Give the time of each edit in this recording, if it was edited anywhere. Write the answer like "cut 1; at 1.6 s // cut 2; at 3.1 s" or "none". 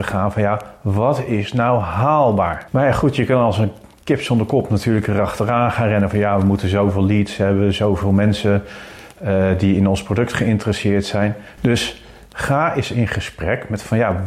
cut 1; at 2.7 s // cut 2; at 11.6 s